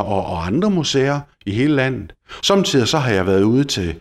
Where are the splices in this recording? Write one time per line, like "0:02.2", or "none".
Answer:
0:02.4